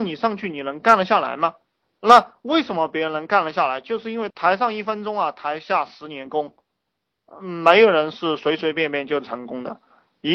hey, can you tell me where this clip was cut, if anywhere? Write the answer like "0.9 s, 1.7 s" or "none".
none